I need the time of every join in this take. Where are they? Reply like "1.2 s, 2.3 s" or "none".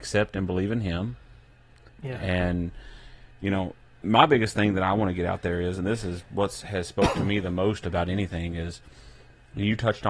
none